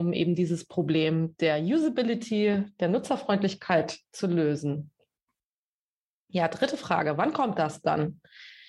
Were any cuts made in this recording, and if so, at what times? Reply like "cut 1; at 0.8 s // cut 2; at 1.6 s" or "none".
none